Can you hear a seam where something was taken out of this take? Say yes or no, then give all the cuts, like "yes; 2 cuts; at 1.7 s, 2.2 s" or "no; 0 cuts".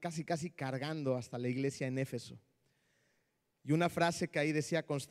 no; 0 cuts